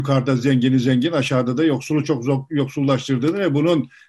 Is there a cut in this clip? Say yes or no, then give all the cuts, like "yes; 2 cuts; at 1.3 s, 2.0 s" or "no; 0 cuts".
no; 0 cuts